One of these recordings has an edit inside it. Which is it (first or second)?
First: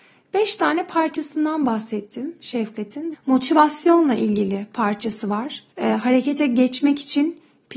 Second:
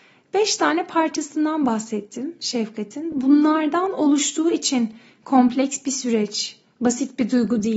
first